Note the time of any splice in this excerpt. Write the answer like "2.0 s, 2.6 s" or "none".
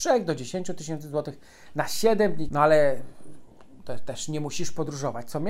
2.5 s

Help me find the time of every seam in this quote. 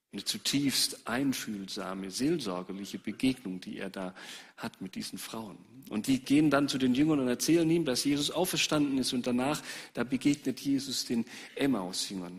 none

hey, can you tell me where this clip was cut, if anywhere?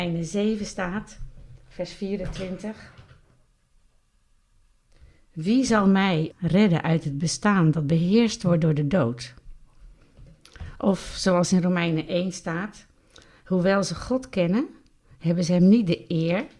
6.3 s

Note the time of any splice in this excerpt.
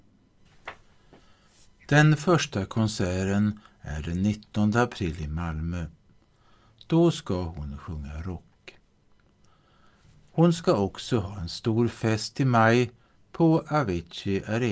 none

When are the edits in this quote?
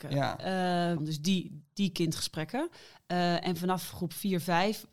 1.0 s

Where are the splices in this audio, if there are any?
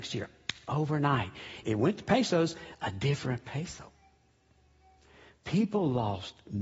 1.6 s

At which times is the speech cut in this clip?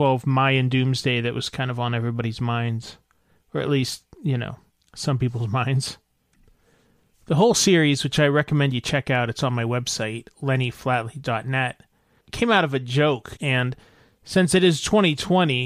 13.4 s

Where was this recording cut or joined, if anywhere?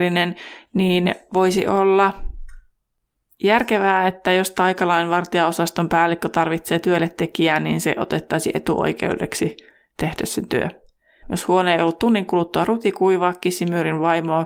11.2 s

